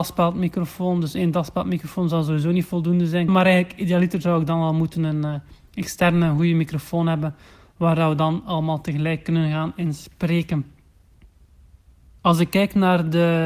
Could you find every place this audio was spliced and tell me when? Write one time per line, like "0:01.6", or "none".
0:03.3